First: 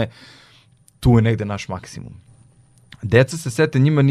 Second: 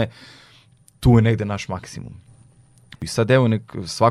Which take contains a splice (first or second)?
second